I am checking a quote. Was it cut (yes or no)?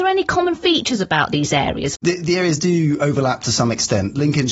yes